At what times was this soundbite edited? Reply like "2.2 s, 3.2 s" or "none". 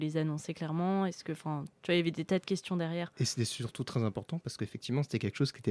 none